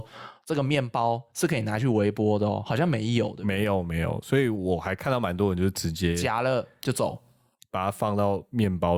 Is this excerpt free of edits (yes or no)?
yes